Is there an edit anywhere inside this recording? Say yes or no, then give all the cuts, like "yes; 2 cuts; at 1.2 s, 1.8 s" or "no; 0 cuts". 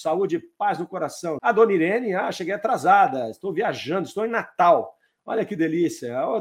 yes; 1 cut; at 1.4 s